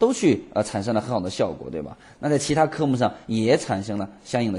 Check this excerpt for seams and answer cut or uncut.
uncut